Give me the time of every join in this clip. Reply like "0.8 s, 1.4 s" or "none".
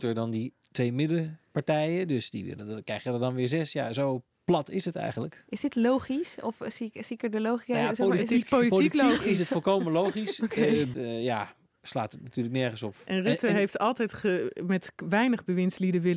10.9 s

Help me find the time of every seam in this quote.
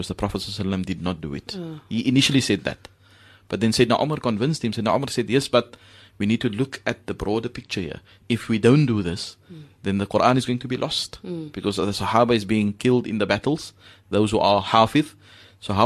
none

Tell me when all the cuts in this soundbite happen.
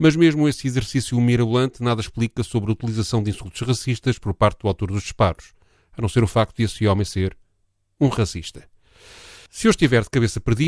none

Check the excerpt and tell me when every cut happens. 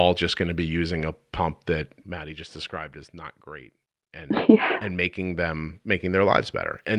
2.0 s, 4.8 s

